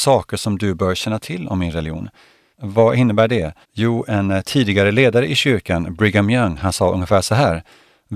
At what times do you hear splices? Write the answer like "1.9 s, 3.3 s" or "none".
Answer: 2.5 s, 3.6 s

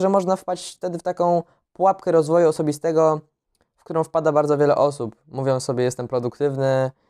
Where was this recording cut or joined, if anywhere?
none

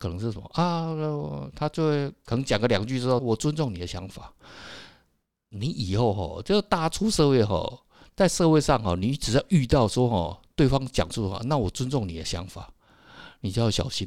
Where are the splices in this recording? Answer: 3.2 s

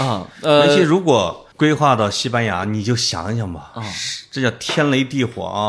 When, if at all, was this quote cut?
1.5 s

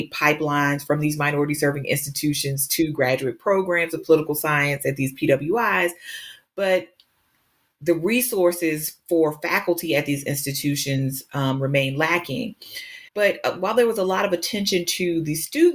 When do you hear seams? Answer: 13.1 s

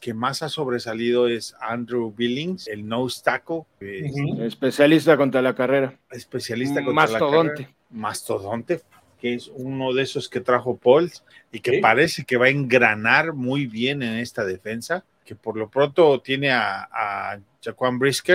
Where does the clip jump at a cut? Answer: none

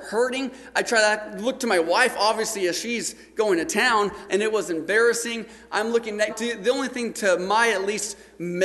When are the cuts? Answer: 4.3 s, 6.3 s

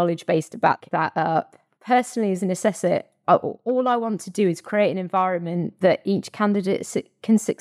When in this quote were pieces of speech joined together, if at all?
1.7 s

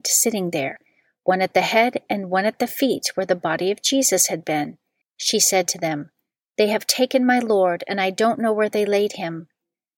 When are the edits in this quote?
5.0 s

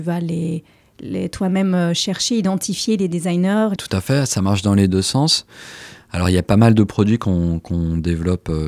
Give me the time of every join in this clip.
3.8 s

